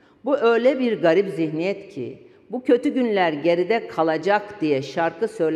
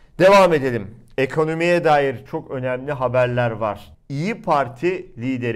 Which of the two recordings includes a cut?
second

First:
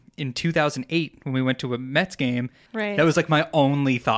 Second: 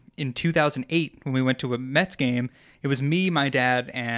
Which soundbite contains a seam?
first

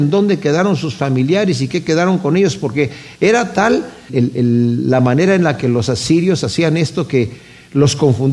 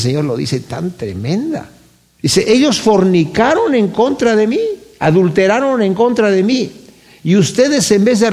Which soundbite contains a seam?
first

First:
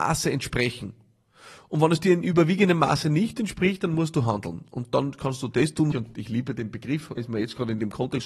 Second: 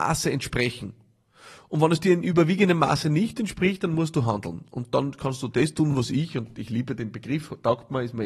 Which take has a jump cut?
first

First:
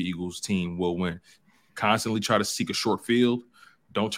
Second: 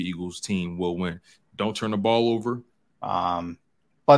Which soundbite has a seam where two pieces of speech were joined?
second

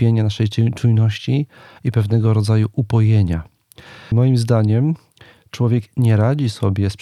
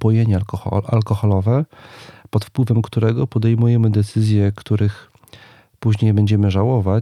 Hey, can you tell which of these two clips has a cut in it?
first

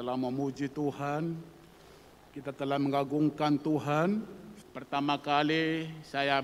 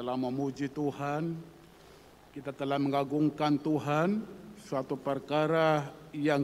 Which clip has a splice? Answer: first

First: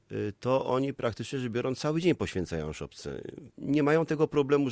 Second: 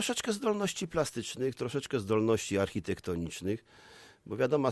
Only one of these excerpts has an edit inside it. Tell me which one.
first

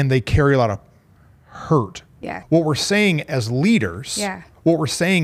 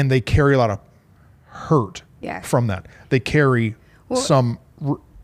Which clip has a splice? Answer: first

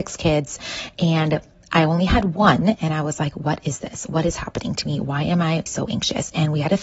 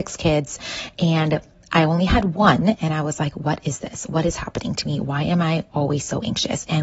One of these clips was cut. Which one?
first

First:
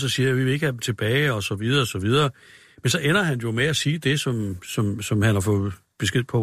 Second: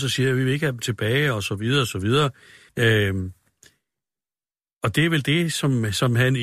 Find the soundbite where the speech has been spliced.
second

